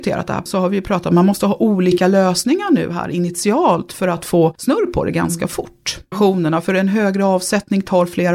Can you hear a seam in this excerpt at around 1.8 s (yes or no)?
no